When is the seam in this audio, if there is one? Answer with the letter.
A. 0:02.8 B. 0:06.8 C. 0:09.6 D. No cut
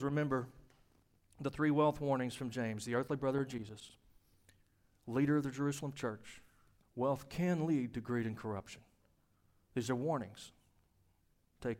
B